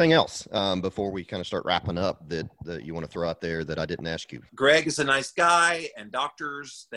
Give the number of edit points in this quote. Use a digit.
1